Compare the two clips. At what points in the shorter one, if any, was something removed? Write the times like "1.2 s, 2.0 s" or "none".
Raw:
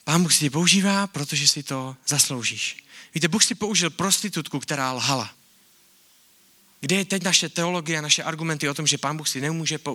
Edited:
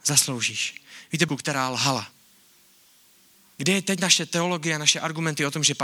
1.3 s